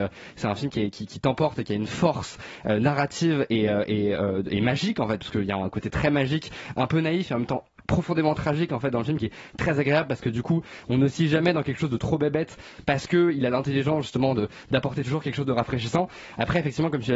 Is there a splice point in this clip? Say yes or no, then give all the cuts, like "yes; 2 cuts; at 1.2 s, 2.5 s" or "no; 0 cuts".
no; 0 cuts